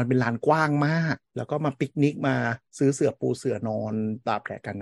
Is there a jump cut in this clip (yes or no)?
yes